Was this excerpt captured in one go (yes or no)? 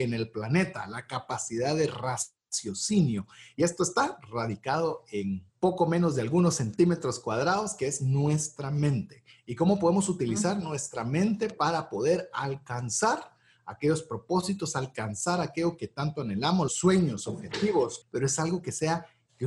no